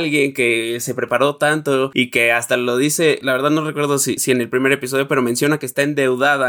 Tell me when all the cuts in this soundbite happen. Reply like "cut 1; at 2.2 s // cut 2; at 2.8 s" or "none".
none